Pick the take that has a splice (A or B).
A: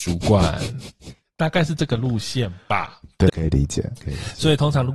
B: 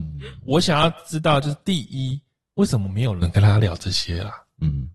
A